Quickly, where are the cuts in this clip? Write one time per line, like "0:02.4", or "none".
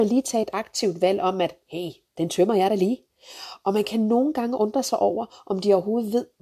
none